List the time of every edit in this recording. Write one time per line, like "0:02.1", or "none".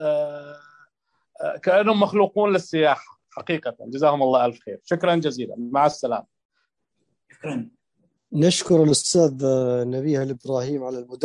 none